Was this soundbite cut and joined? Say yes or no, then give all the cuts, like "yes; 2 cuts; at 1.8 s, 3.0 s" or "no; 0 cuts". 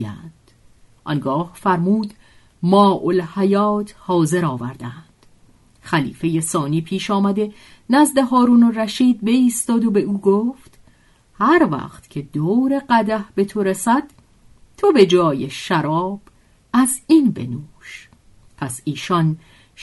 no; 0 cuts